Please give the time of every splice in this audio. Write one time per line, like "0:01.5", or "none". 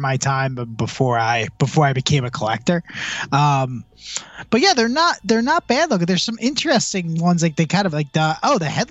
none